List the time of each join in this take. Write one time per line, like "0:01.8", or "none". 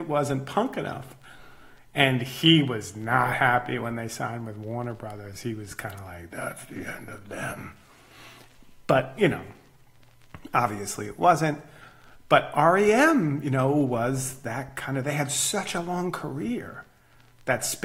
none